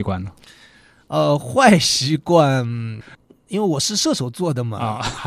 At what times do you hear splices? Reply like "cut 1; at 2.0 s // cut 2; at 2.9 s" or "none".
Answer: none